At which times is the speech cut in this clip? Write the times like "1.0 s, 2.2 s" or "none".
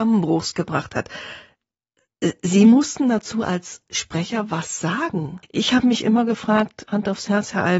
5.4 s, 6.9 s

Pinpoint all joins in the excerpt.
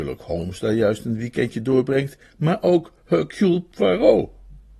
none

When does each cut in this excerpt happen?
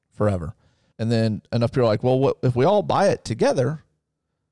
0.9 s

